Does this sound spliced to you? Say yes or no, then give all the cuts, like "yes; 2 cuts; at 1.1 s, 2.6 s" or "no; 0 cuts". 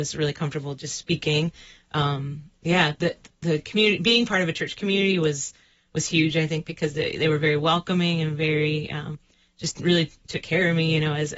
no; 0 cuts